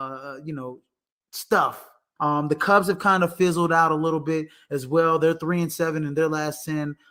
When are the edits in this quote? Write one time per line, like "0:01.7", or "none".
0:02.2